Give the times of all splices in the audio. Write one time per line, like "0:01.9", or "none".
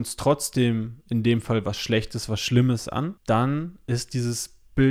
0:03.2